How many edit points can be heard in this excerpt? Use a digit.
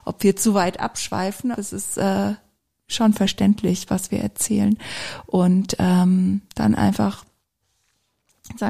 1